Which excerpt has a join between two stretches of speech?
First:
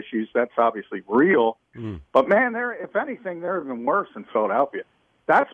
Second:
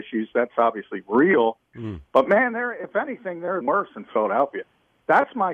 second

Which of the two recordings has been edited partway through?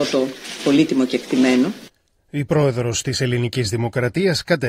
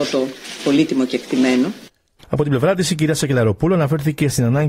second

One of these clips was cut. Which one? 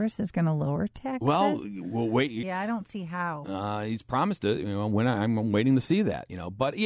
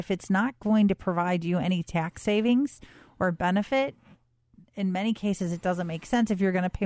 first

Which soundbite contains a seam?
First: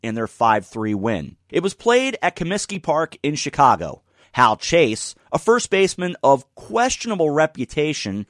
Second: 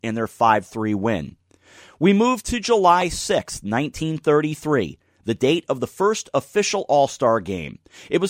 first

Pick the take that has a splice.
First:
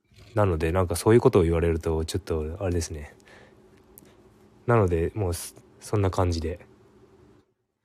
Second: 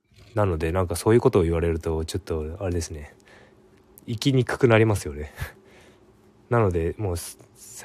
first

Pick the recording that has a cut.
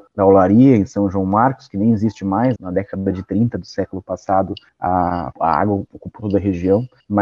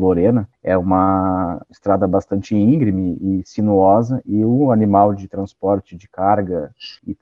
first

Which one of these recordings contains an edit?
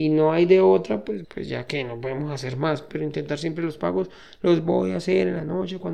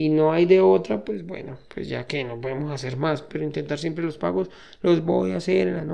first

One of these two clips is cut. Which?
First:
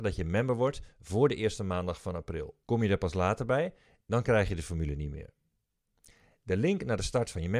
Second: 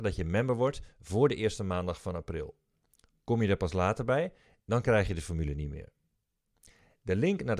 first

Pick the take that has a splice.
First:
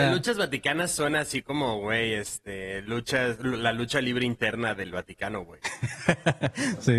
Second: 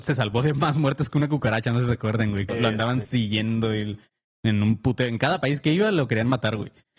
second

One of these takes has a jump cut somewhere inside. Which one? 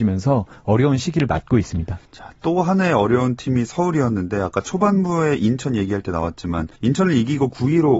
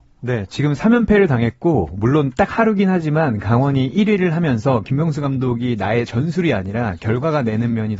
first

